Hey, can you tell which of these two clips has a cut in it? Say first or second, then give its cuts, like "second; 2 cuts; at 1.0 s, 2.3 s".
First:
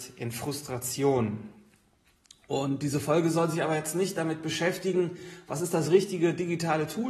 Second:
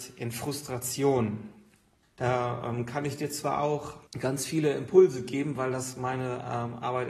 second; 2 cuts; at 2.0 s, 4.1 s